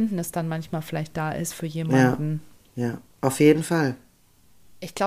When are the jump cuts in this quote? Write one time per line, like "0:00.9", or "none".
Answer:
none